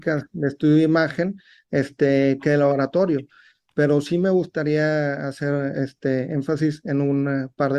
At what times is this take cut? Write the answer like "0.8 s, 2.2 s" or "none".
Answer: none